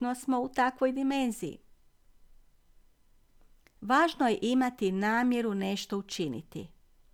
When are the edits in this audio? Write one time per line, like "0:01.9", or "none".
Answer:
none